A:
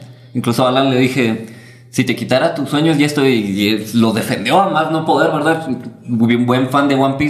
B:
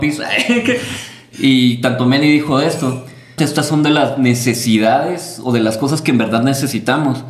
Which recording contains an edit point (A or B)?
B